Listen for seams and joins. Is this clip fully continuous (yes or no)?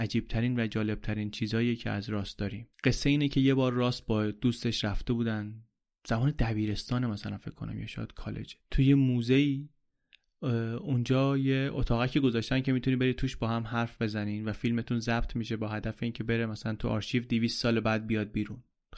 no